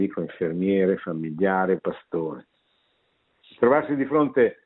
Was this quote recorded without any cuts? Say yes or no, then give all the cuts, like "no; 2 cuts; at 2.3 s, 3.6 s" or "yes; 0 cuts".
no; 1 cut; at 1.8 s